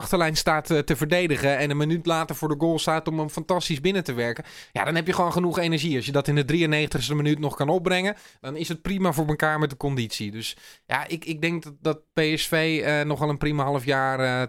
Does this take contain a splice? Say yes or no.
no